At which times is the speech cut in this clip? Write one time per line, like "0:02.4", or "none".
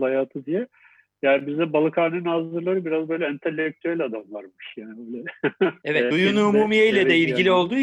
0:06.1